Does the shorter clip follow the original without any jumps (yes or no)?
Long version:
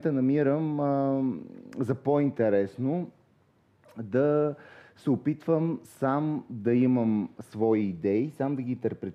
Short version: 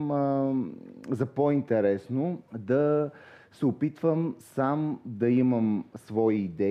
no